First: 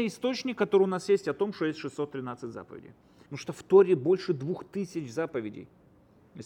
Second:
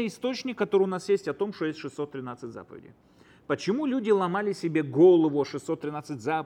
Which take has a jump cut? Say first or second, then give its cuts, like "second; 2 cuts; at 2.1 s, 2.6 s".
first; 1 cut; at 3.2 s